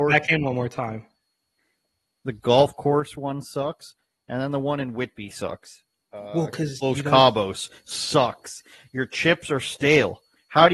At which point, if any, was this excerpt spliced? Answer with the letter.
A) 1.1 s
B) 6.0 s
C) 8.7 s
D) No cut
D